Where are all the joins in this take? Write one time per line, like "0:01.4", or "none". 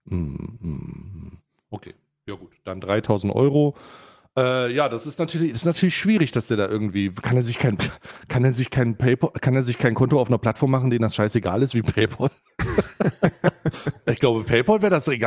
none